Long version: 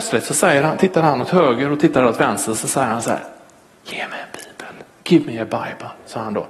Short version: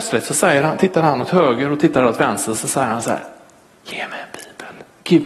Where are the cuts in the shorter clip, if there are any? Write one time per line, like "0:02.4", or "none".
none